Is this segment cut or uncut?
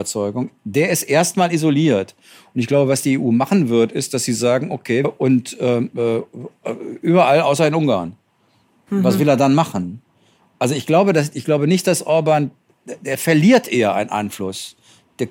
cut